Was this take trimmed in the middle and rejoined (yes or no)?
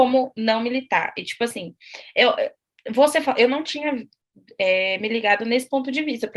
no